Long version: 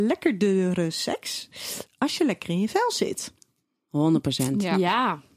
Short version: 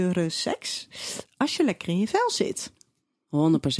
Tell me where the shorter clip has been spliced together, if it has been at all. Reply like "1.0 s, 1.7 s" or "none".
none